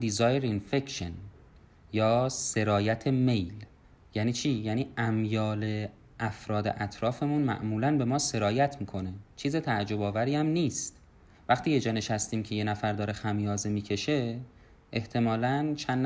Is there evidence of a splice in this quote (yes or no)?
yes